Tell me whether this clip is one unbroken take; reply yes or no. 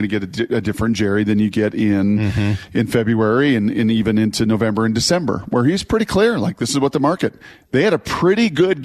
yes